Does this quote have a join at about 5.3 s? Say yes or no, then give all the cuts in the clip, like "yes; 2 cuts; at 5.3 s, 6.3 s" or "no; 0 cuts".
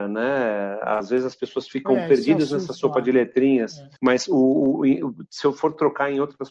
no; 1 cut; at 4.0 s